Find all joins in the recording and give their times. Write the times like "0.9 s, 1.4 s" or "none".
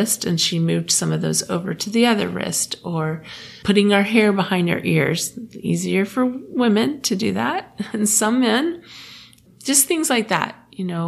3.6 s